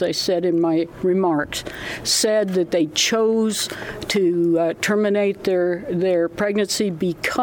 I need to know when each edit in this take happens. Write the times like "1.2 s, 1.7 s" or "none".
none